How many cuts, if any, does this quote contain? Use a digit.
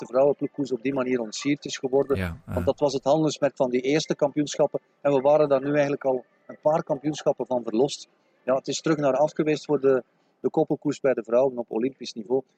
0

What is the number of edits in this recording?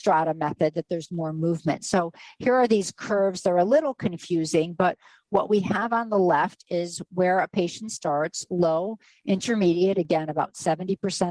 0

